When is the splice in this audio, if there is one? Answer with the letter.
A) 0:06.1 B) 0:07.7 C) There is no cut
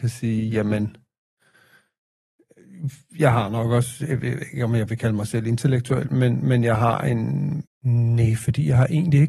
B